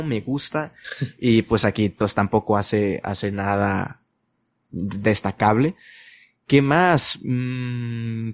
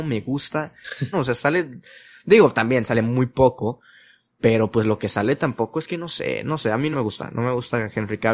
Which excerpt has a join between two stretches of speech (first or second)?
second